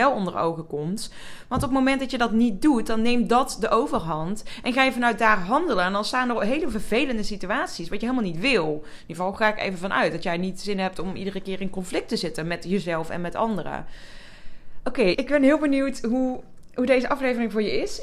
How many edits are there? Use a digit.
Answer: 1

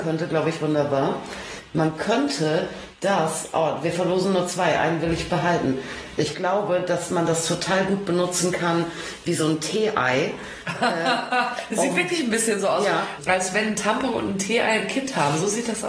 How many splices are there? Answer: 0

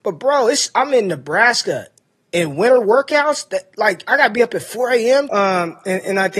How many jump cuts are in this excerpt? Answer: 1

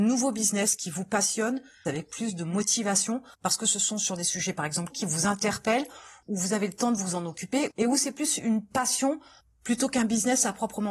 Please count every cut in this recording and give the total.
2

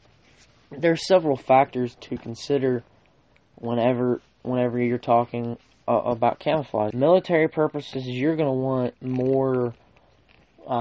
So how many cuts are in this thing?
1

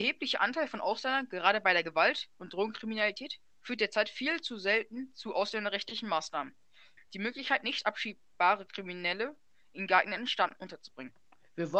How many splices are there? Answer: 1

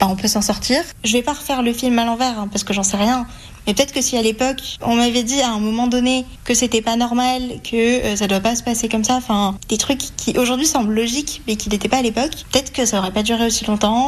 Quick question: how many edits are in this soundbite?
1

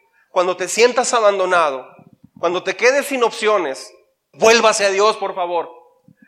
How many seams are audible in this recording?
1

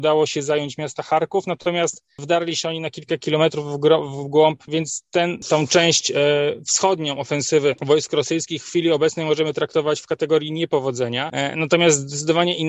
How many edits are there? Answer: 1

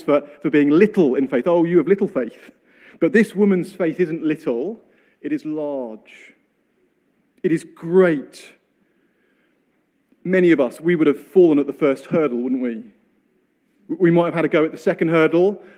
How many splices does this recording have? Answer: 0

